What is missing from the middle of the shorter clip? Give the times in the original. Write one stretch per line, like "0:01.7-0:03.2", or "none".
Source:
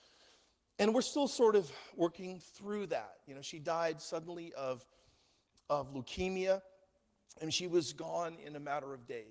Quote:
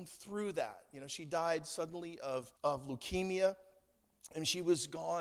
0:04.9-0:05.6